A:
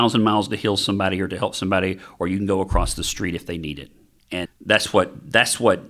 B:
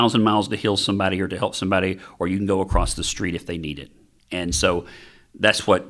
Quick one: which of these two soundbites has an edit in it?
A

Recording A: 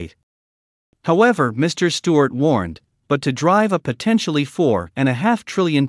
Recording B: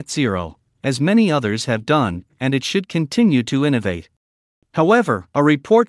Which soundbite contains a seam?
B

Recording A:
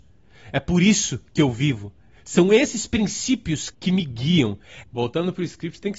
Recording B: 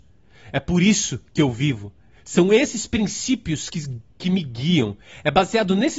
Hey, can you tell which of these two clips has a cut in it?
A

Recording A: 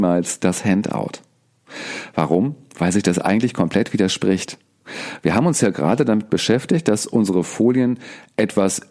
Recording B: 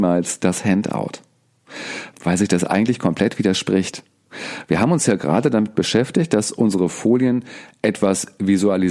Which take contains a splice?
B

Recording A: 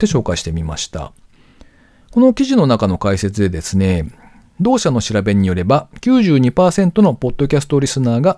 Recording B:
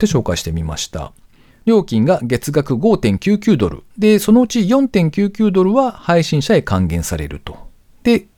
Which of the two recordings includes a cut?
B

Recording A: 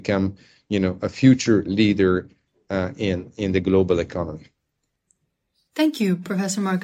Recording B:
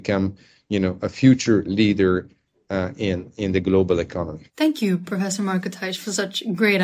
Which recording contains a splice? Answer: B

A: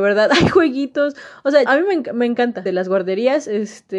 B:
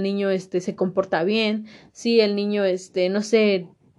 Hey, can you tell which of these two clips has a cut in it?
A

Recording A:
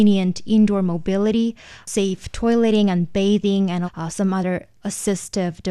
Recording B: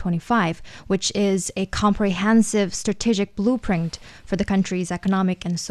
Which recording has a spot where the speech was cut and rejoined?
A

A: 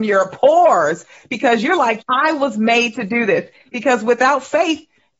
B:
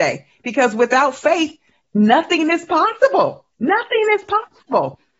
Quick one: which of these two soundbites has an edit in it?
A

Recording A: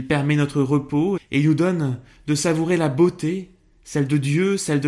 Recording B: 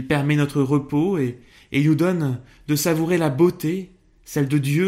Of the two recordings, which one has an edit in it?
A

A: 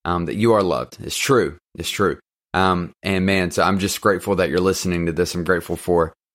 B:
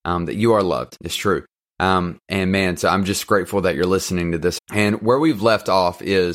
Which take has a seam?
B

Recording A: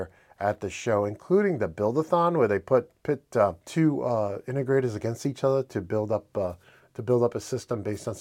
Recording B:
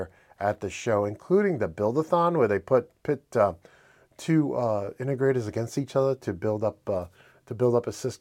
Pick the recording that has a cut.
A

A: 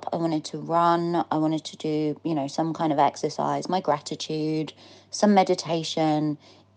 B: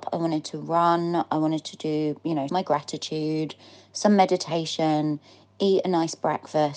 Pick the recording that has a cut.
B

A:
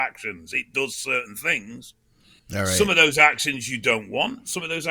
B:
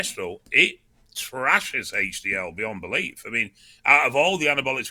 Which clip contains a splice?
A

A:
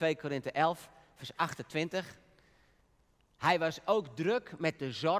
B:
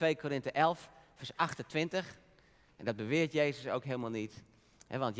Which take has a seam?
B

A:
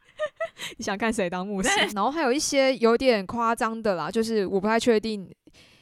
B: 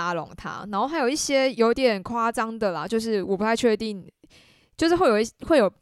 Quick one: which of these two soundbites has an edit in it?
A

